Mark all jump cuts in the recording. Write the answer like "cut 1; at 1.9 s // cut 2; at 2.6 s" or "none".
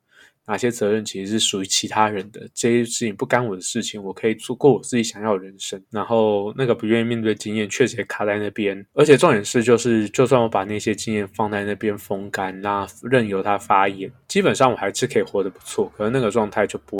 cut 1; at 5.8 s